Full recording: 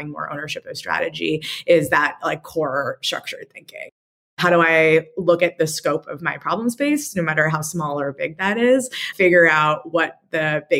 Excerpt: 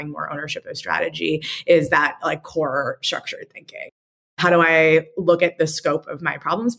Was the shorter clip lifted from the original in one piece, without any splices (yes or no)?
yes